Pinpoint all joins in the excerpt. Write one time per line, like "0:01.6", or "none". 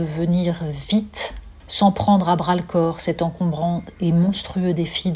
0:01.6

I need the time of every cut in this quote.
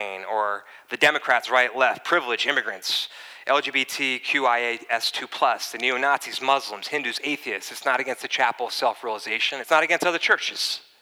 0:01.4
0:09.6

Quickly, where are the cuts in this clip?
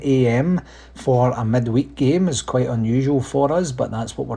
none

